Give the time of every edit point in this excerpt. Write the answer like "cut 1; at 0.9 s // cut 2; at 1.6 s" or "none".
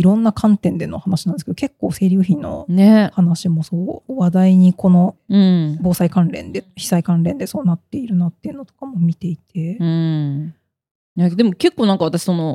none